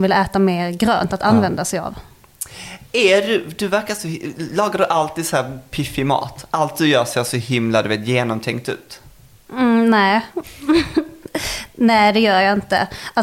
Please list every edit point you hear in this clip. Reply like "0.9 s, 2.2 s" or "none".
none